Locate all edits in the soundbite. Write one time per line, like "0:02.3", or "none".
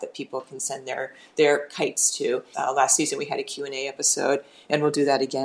0:02.5